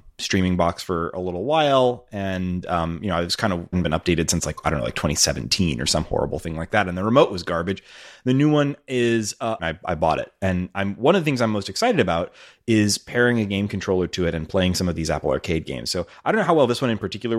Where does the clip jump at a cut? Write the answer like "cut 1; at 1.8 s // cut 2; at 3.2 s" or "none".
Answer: cut 1; at 3.7 s // cut 2; at 9.6 s